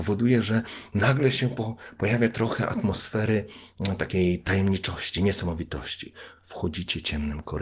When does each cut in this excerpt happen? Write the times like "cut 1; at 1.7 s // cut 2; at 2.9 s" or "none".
none

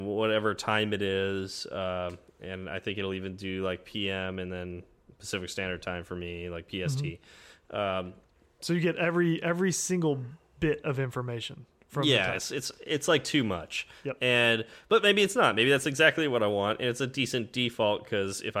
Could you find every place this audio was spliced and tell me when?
none

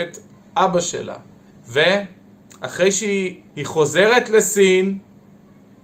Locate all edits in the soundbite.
cut 1; at 1.5 s // cut 2; at 3.5 s

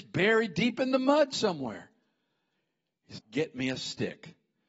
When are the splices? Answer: cut 1; at 3.2 s

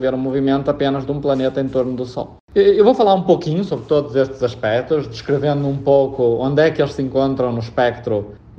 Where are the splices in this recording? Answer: cut 1; at 2.5 s

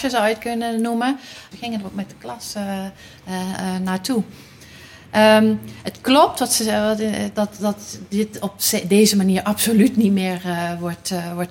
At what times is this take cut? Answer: cut 1; at 1.5 s

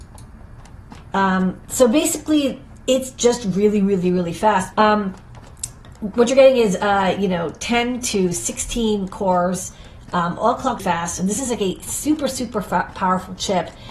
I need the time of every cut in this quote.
cut 1; at 4.7 s // cut 2; at 10.8 s

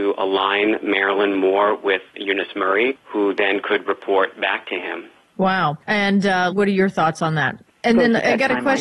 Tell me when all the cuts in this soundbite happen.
cut 1; at 6.5 s // cut 2; at 7.7 s

